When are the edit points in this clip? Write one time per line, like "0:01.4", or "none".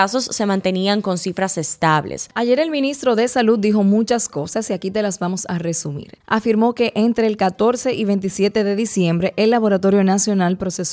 0:02.3